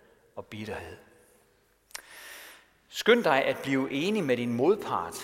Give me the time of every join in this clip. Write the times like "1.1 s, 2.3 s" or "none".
none